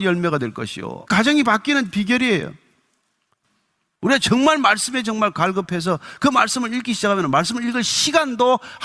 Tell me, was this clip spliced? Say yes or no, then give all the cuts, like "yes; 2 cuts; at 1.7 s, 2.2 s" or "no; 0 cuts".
yes; 1 cut; at 1.1 s